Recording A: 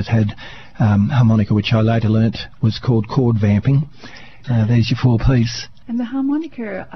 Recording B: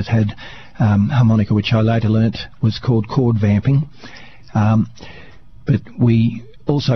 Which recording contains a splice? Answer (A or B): A